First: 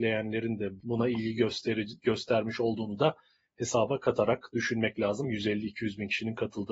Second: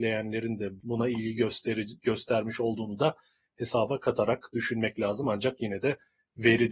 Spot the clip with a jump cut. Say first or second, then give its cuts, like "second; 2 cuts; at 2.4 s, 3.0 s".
first; 1 cut; at 5.2 s